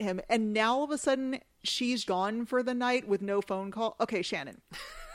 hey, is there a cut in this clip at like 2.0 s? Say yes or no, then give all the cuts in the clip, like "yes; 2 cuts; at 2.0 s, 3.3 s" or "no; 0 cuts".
yes; 1 cut; at 2.0 s